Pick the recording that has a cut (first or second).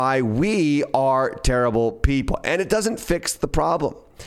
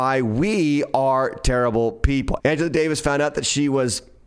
second